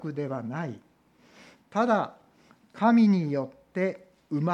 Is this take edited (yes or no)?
no